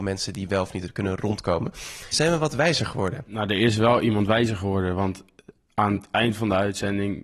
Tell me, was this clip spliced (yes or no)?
yes